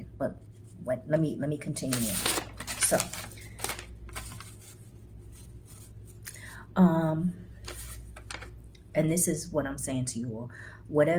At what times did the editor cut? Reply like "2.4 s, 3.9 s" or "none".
none

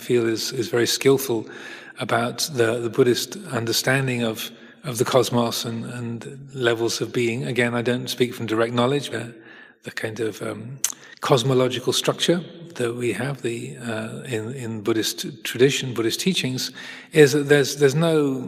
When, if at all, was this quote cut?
9.1 s

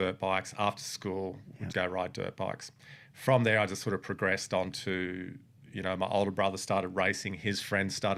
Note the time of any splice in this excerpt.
1.7 s

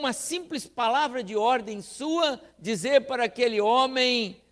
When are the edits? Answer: none

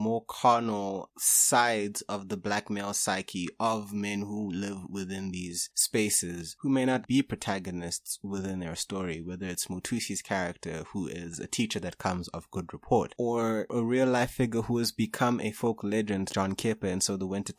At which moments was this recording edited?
7.0 s, 16.3 s

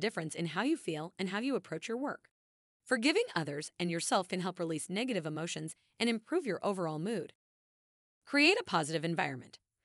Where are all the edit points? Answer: 2.8 s

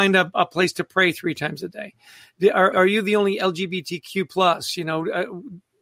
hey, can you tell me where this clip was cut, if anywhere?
2.7 s

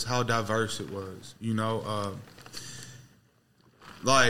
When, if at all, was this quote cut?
none

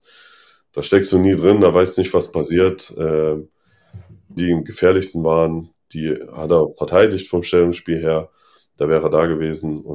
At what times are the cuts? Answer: 4.4 s

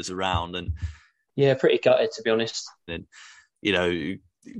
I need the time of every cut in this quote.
1.3 s, 2.9 s

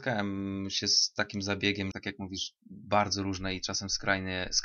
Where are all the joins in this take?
1.9 s

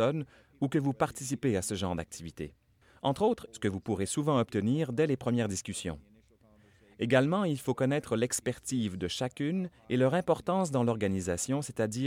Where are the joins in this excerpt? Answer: 3.5 s

